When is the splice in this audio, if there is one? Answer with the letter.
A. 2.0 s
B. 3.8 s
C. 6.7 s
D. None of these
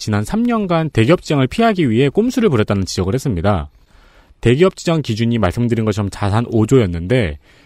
D